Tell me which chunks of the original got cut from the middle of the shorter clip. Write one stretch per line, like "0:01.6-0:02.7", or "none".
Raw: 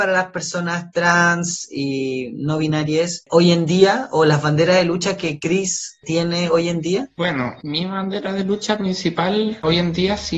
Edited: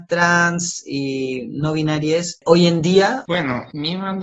0:04.1-0:07.1